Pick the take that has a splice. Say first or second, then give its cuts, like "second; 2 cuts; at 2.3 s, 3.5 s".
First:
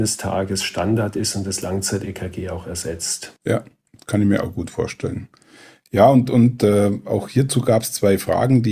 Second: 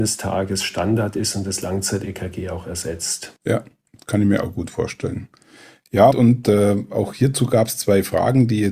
second; 1 cut; at 6.1 s